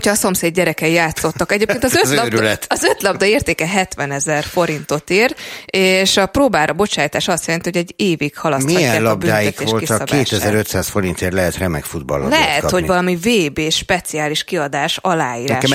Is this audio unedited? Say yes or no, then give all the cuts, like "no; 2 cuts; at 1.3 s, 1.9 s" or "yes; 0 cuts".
yes; 0 cuts